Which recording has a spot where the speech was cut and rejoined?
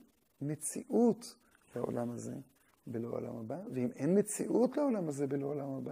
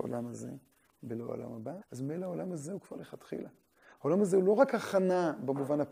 second; 1 cut; at 1.8 s

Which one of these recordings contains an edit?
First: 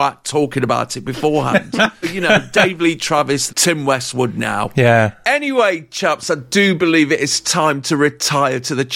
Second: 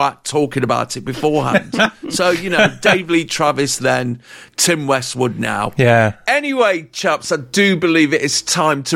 first; 2 cuts; at 2.0 s, 3.5 s

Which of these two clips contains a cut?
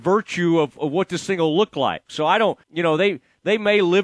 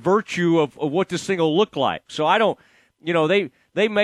first; 1 cut; at 2.6 s

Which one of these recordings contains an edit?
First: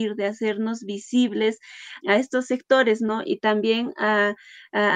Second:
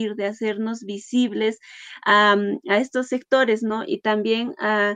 first; 1 cut; at 2.0 s

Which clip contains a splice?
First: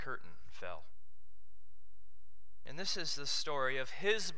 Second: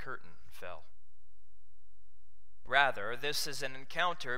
second; 1 cut; at 2.7 s

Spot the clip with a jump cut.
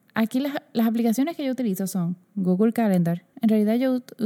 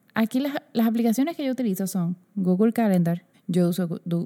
second; 1 cut; at 3.3 s

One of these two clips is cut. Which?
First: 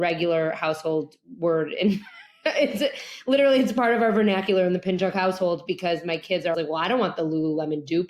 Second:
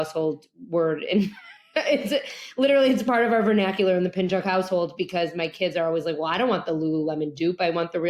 first; 1 cut; at 6.5 s

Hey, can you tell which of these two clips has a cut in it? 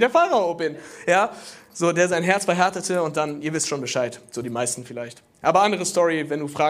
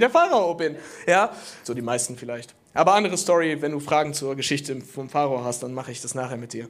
second; 1 cut; at 1.6 s

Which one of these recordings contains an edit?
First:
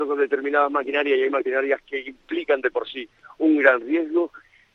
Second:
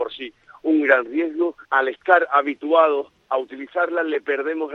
second; 1 cut; at 1.6 s

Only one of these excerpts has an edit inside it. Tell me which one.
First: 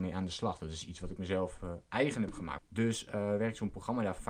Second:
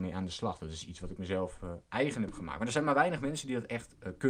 first; 1 cut; at 2.6 s

